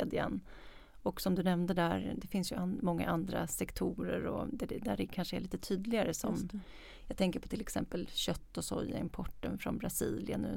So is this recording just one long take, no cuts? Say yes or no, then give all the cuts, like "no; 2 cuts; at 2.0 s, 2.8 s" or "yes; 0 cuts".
yes; 0 cuts